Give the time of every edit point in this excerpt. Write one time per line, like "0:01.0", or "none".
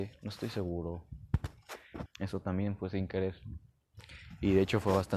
0:02.1